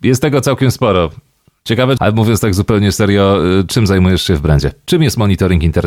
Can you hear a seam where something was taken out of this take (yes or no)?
yes